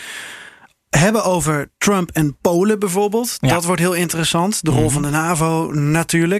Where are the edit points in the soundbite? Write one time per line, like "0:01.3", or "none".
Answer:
none